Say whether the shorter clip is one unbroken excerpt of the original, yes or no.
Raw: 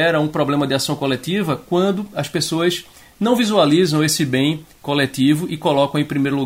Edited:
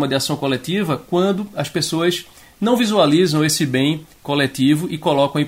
yes